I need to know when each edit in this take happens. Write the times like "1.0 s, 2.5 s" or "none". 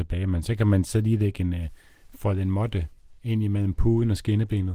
none